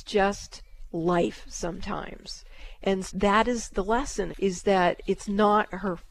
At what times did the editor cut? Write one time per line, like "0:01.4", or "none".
0:03.1
0:04.3